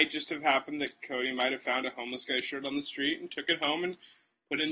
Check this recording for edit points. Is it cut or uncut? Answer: uncut